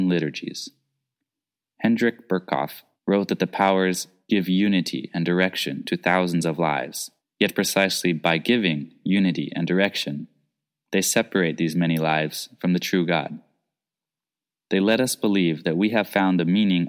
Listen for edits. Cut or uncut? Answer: uncut